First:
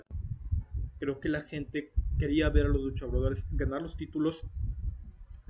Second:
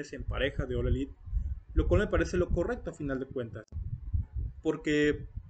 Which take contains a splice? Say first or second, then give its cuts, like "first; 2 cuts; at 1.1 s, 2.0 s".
first; 1 cut; at 1.0 s